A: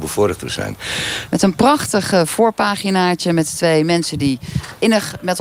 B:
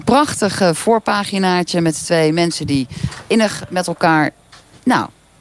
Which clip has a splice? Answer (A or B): A